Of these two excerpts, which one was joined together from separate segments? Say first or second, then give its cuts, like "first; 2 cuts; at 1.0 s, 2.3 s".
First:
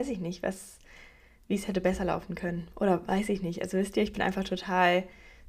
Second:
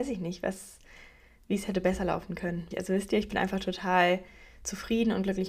second; 1 cut; at 2.7 s